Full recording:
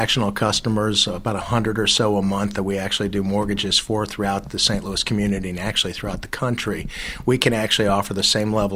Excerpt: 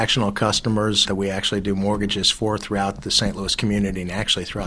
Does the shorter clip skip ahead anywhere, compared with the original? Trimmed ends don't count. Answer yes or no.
yes